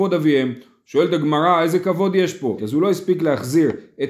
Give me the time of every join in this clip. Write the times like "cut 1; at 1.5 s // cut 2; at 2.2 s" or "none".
cut 1; at 2.6 s